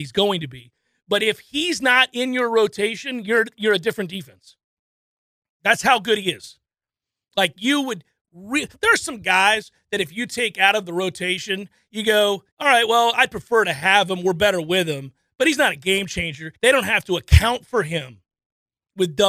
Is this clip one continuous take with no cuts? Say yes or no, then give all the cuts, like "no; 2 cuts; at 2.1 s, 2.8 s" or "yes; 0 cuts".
no; 2 cuts; at 12.5 s, 16.5 s